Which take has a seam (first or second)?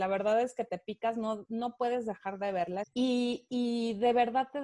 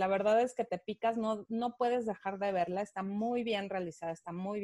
first